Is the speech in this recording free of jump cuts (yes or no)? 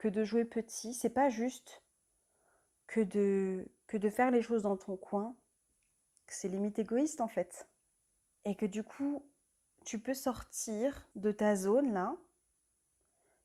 no